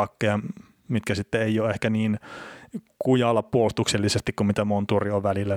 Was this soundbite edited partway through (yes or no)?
no